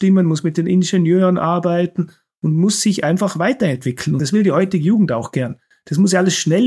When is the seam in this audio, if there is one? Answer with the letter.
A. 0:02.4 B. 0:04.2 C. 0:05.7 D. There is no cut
B